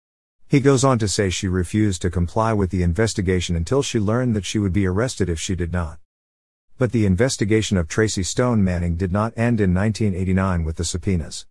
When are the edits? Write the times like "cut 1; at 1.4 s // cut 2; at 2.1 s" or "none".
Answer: none